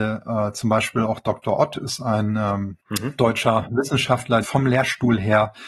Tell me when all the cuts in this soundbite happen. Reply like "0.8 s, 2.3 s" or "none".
2.8 s, 4.4 s

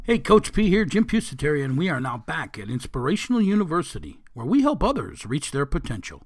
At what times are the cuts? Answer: none

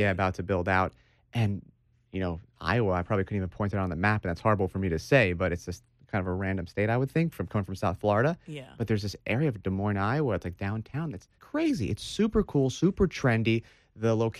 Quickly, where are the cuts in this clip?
11.3 s

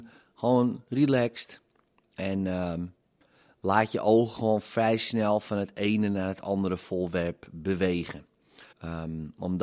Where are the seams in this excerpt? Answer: 8.7 s

